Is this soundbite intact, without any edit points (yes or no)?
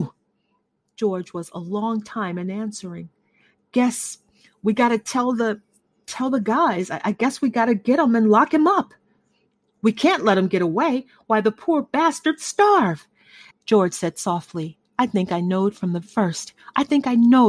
no